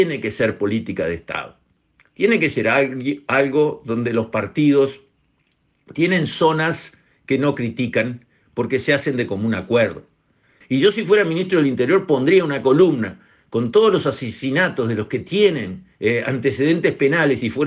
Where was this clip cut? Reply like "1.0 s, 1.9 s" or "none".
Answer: 10.6 s, 15.9 s